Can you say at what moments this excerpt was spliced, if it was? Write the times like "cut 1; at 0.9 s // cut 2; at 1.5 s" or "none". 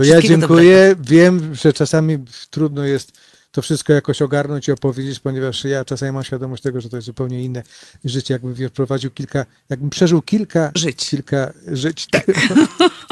cut 1; at 12.1 s